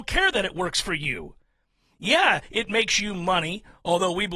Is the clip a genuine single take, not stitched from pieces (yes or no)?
yes